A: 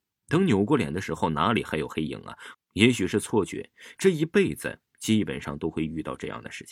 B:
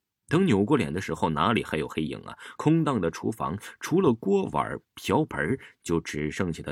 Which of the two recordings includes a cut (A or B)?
A